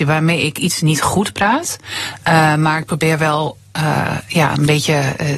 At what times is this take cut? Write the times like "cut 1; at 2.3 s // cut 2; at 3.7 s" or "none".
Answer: none